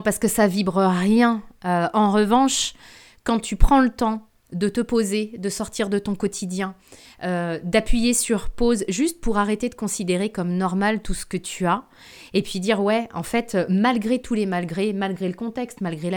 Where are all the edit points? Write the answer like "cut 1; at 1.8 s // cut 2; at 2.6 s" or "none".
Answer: none